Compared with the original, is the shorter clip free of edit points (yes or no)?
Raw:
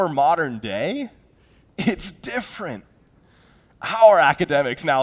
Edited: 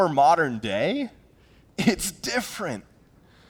yes